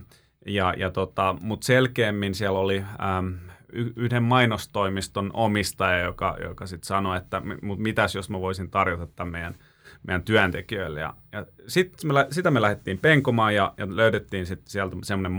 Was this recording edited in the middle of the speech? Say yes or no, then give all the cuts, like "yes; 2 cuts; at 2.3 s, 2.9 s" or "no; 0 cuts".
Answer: no; 0 cuts